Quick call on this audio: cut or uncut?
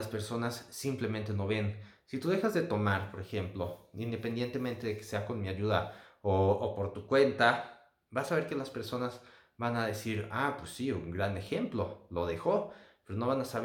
uncut